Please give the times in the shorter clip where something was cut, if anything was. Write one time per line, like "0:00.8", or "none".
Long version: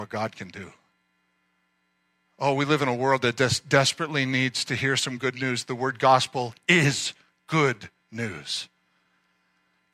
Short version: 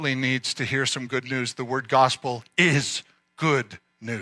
none